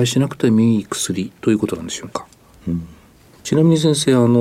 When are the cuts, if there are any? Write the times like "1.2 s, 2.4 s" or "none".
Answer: 2.6 s